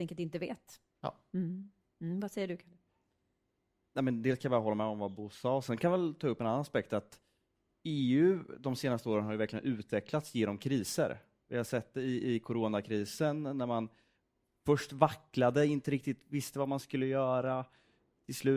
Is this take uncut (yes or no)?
yes